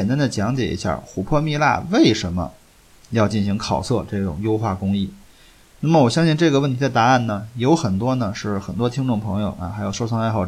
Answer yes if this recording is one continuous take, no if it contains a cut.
yes